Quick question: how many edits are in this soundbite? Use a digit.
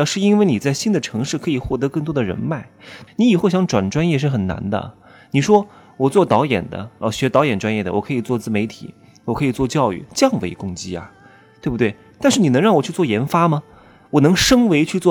1